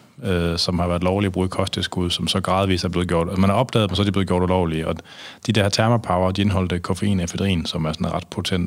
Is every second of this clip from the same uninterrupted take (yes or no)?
yes